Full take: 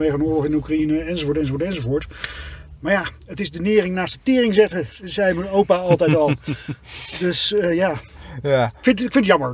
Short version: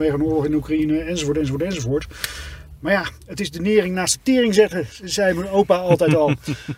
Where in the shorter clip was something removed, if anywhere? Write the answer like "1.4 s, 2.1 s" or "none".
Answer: none

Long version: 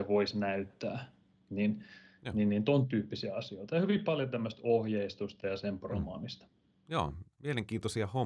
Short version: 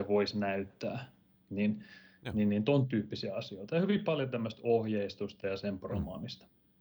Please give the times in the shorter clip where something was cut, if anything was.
none

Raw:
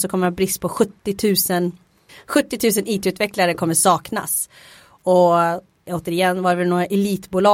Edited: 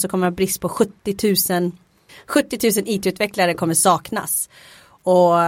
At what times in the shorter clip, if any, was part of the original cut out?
none

